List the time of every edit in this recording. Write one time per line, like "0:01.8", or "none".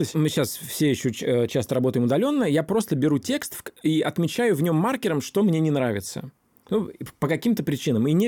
none